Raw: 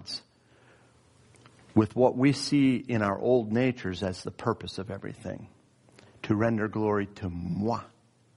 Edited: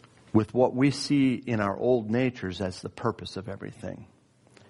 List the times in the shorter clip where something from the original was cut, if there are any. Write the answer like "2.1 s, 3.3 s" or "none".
none